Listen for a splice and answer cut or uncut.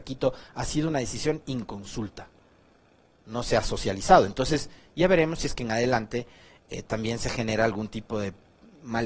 uncut